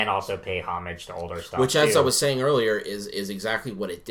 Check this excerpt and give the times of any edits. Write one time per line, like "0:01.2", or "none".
none